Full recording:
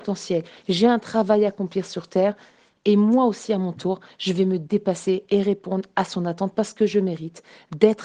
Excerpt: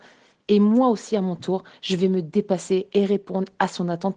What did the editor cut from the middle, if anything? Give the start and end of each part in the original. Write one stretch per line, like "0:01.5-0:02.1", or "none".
none